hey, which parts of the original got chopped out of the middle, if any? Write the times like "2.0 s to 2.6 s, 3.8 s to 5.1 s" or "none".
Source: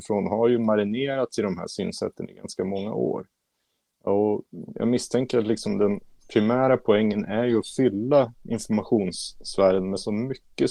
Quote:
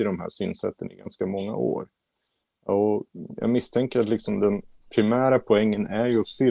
none